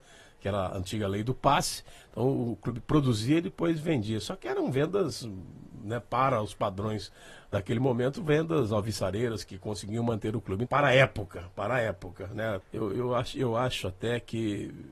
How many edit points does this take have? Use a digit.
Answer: 2